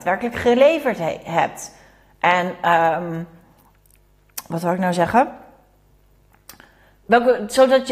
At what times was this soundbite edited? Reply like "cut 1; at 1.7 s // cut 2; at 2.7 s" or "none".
none